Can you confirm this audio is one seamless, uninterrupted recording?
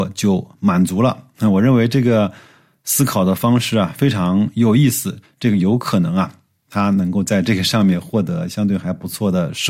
no; 1 cut; at 5.2 s

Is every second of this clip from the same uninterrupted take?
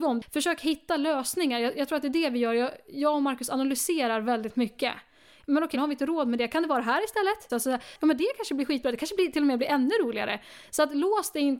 no; 2 cuts; at 5.7 s, 7.5 s

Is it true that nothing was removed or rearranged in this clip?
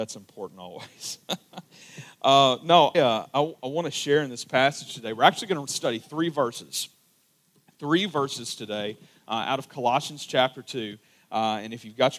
no; 1 cut; at 2.9 s

